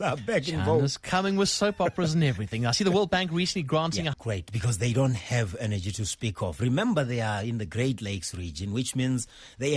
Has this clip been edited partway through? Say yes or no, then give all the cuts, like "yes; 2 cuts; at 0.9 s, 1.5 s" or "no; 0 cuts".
yes; 1 cut; at 4.1 s